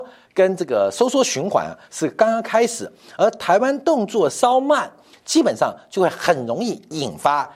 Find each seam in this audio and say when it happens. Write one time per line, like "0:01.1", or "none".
none